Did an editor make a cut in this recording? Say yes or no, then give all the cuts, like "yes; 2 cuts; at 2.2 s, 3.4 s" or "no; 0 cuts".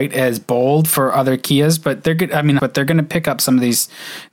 yes; 1 cut; at 2.6 s